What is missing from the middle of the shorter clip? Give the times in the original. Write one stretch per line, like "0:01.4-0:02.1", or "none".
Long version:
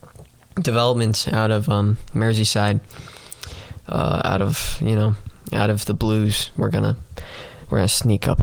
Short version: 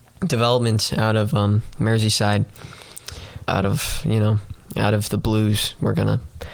0:03.8-0:04.2